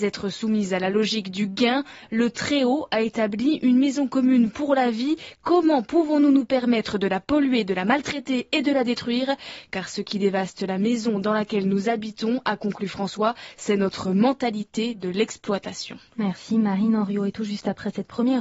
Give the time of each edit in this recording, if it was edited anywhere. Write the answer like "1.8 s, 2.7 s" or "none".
none